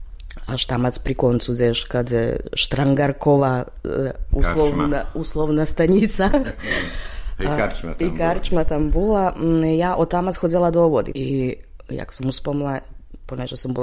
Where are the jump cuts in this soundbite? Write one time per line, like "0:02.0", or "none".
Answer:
0:11.1